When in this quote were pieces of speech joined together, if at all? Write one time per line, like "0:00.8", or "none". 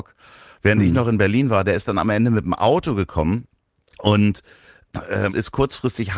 0:05.3

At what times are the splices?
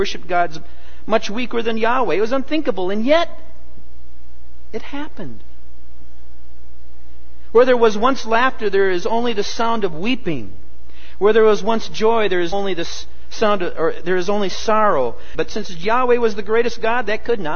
0:12.5
0:15.3

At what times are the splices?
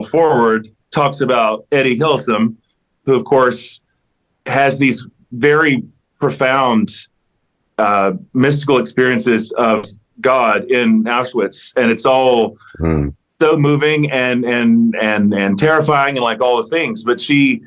none

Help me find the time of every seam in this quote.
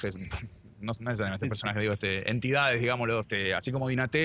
0:03.2

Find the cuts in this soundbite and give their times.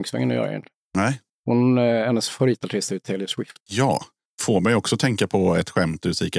0:03.6

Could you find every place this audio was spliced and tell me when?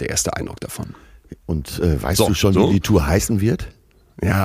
none

